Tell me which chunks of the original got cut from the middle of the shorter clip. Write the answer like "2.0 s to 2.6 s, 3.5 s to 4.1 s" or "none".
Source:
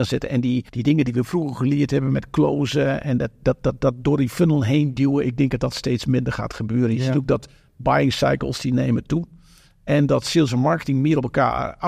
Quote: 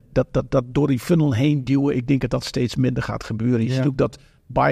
none